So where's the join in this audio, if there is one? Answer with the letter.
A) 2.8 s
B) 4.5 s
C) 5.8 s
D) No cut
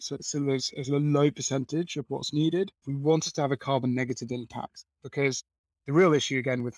A